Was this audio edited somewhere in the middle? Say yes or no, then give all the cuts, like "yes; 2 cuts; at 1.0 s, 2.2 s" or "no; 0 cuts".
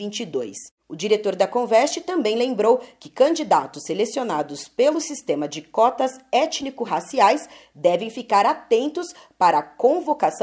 no; 0 cuts